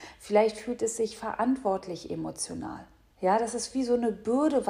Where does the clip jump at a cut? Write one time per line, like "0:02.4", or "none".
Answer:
0:03.1